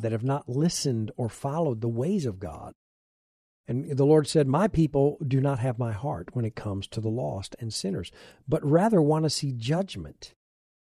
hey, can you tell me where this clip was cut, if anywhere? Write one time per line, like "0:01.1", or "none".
none